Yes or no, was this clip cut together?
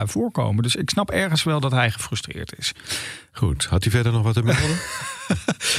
no